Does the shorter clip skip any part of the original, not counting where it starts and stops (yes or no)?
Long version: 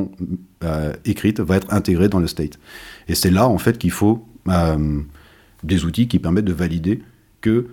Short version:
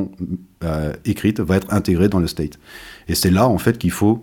no